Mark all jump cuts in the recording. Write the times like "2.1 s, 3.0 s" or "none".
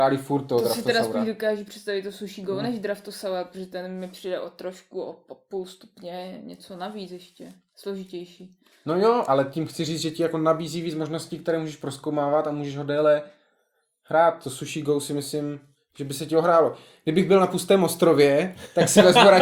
none